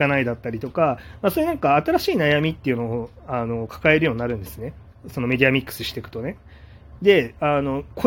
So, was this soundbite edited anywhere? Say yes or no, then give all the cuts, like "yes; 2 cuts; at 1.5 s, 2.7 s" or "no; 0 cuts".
yes; 1 cut; at 7.0 s